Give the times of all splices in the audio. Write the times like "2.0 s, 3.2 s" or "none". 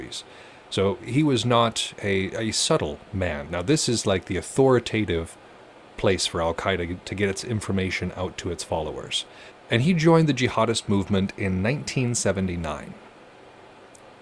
3.5 s, 9.5 s